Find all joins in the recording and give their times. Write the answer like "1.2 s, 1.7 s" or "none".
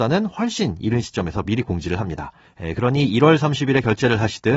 2.5 s